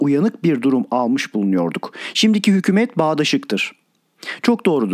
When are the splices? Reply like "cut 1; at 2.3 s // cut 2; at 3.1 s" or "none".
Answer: cut 1; at 2.1 s